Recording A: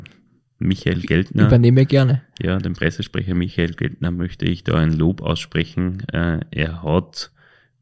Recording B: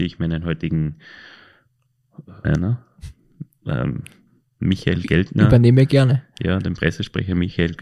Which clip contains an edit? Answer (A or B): B